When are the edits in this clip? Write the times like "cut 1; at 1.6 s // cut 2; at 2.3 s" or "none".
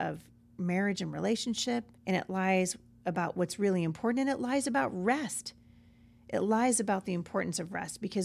cut 1; at 2.0 s